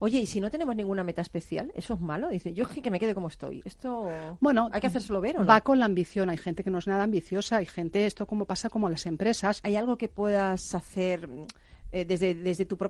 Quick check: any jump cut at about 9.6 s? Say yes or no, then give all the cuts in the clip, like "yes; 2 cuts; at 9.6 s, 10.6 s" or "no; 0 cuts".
yes; 1 cut; at 9.6 s